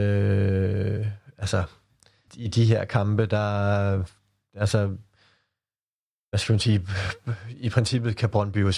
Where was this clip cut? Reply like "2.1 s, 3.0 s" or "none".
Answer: 2.3 s